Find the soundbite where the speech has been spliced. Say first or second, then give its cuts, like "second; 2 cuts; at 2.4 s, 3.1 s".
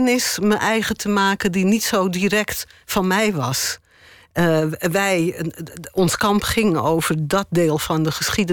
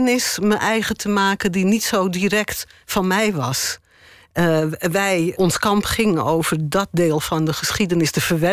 second; 1 cut; at 5.3 s